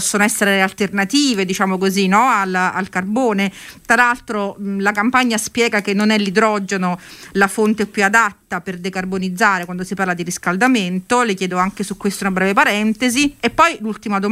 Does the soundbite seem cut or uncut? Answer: uncut